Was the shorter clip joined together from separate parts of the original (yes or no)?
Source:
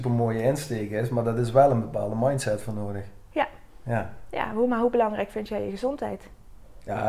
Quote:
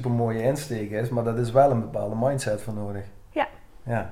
no